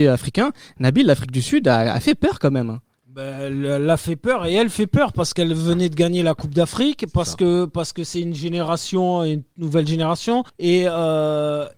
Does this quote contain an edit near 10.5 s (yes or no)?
yes